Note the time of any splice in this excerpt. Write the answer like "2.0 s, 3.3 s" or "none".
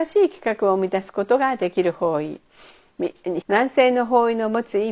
3.4 s